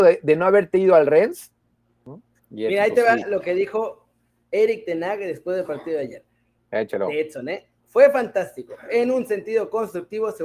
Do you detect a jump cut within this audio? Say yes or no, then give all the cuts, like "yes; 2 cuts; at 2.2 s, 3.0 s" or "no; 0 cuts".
yes; 1 cut; at 2.4 s